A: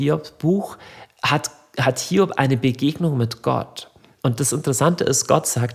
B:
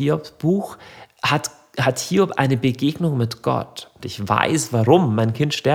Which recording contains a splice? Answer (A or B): B